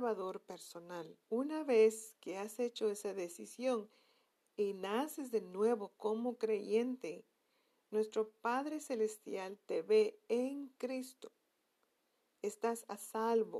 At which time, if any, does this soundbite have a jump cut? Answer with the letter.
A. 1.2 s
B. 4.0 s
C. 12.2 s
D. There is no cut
A